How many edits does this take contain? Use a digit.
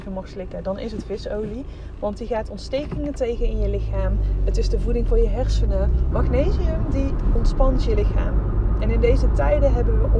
1